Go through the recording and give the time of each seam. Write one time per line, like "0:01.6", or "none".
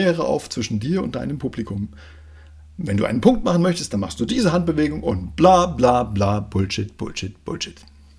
none